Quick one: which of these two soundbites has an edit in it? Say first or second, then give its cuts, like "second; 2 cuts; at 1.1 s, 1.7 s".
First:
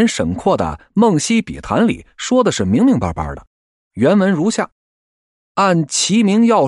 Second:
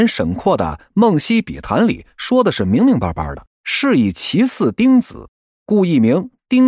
second; 1 cut; at 3.6 s